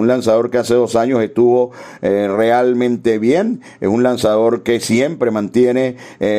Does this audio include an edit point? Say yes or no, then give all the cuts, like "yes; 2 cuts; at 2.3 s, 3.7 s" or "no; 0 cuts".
no; 0 cuts